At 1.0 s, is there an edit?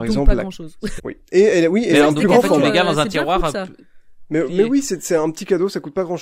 yes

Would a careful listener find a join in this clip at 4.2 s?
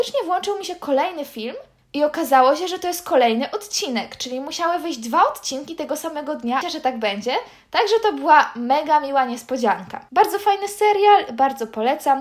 no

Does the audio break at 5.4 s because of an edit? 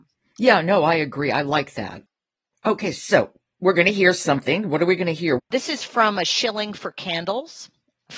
yes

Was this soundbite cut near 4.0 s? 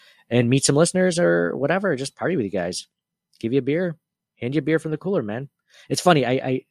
no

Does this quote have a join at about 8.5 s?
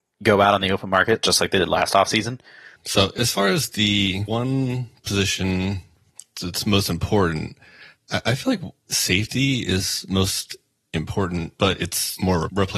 no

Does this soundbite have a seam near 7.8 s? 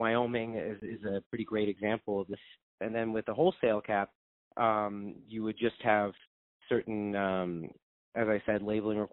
no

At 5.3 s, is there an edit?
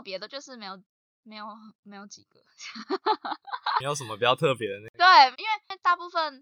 yes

